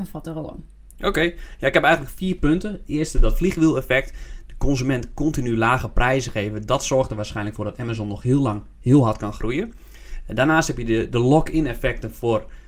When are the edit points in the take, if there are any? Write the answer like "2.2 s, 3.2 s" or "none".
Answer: none